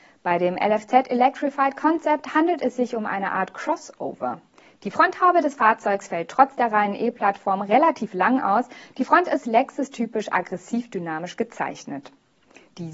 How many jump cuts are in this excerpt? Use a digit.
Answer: 0